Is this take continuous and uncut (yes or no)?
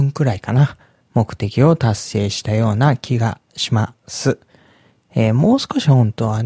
yes